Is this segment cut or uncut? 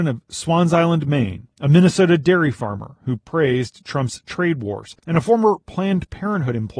cut